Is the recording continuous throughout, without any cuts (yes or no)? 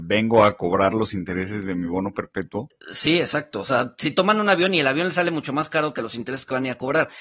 yes